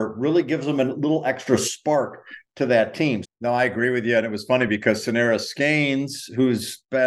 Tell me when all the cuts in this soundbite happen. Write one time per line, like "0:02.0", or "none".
0:03.2